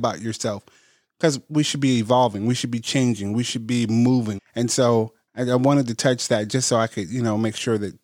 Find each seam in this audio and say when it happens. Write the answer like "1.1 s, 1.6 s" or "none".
4.4 s